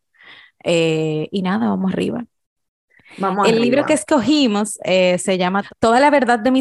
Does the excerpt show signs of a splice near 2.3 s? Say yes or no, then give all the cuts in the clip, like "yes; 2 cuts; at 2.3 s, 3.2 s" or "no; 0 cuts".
no; 0 cuts